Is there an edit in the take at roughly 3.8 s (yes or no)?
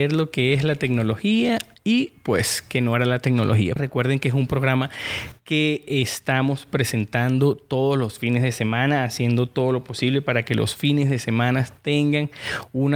yes